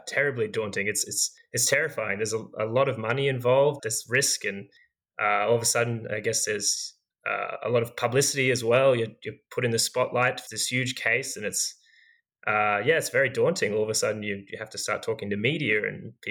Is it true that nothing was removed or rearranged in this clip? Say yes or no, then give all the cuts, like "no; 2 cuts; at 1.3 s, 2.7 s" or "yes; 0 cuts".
no; 2 cuts; at 3.8 s, 10.5 s